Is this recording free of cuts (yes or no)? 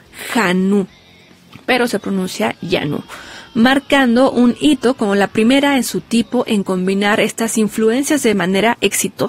yes